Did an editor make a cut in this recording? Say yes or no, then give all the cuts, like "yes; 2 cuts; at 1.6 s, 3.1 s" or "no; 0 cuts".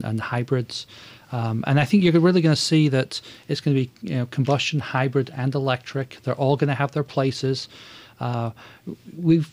no; 0 cuts